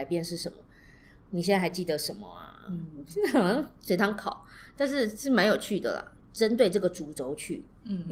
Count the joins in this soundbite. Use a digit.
1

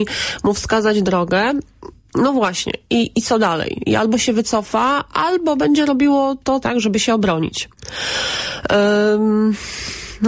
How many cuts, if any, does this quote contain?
2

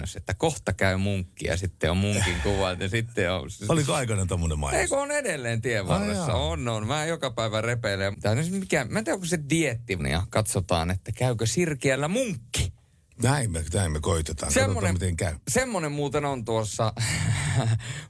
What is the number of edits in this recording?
2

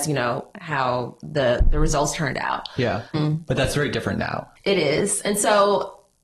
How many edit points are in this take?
2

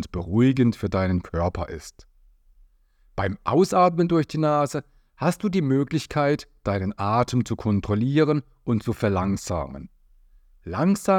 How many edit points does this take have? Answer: 0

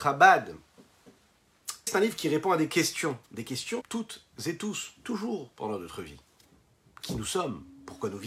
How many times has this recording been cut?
2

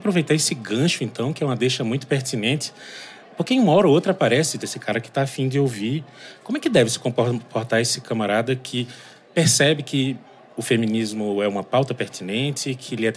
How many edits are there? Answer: 1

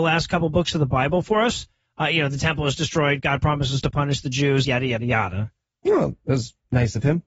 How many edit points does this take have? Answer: 1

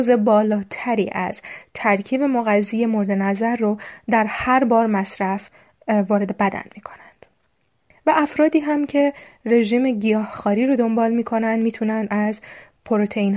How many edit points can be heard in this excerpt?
1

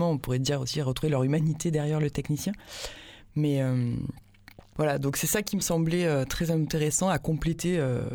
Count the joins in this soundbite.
0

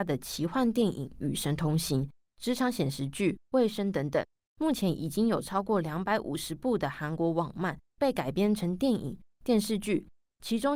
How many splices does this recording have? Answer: 1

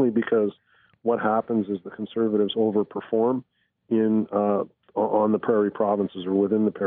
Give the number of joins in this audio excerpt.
0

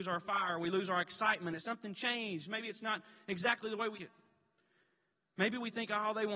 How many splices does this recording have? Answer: 2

